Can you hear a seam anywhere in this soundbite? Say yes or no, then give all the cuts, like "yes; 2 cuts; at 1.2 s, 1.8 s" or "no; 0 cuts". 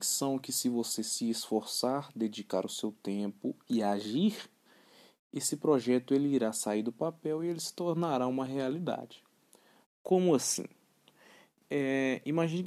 yes; 1 cut; at 9.8 s